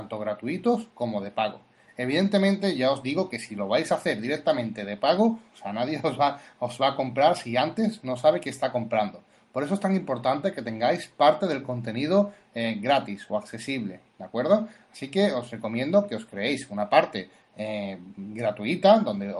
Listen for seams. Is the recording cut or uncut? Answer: cut